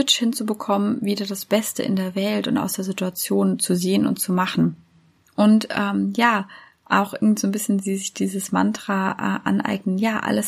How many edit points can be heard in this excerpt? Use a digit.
1